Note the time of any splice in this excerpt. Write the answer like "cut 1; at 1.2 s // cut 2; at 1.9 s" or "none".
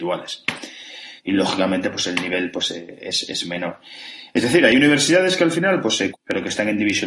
cut 1; at 1.2 s // cut 2; at 6.1 s